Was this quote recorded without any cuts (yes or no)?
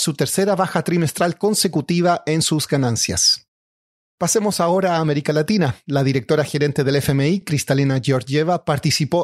yes